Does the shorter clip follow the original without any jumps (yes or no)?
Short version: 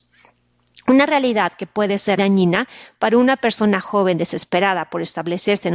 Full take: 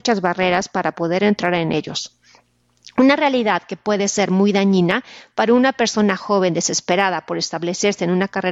no